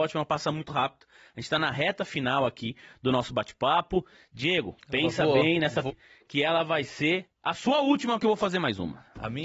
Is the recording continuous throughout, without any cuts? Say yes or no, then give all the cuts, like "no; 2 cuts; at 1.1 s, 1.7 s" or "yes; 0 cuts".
no; 1 cut; at 5.9 s